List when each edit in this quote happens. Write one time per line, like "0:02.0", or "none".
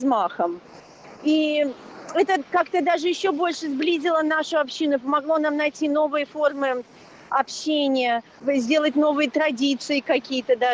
none